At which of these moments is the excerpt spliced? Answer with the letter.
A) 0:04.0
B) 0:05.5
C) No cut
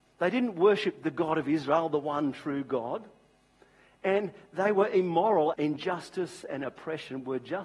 B